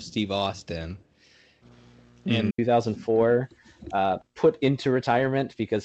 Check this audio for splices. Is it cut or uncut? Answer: cut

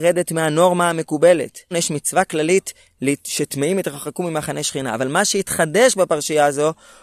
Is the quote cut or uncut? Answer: cut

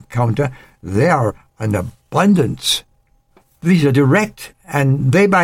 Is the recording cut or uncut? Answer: uncut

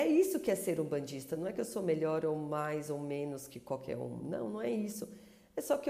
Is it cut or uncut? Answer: uncut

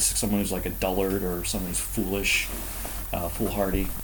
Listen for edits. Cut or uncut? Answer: uncut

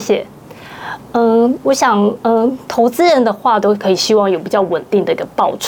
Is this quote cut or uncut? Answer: cut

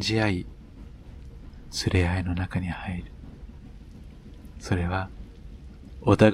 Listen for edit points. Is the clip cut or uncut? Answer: uncut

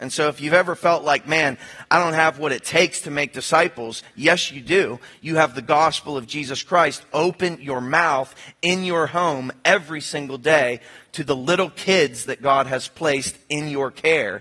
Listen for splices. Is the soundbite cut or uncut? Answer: uncut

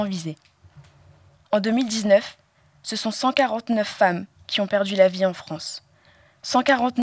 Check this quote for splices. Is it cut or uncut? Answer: cut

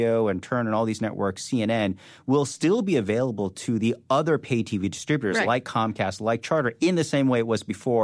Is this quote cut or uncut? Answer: uncut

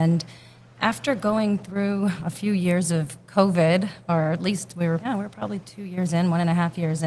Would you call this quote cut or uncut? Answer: cut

